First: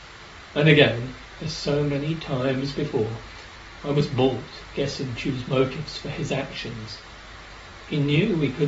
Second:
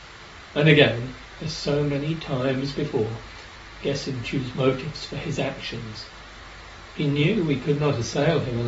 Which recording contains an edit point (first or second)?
second